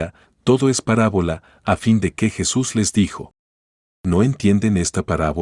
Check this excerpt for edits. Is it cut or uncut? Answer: uncut